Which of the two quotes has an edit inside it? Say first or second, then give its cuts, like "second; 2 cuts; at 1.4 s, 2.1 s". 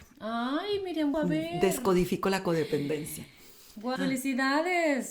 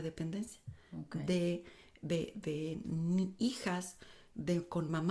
first; 2 cuts; at 1.1 s, 4.0 s